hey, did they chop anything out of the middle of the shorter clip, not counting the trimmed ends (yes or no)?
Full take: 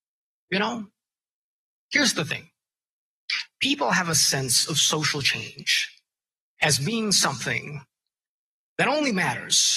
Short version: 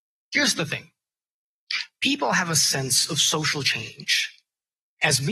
no